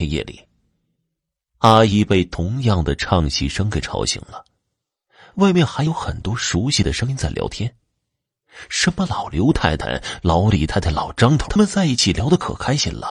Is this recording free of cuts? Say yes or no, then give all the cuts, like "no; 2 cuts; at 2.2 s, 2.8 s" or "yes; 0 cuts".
no; 1 cut; at 11.5 s